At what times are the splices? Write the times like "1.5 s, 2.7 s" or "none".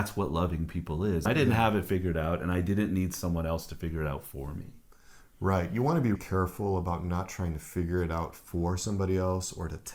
1.2 s, 6.1 s